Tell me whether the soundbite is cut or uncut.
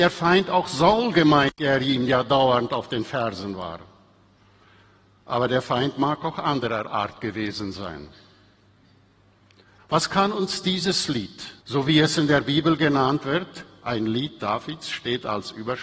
cut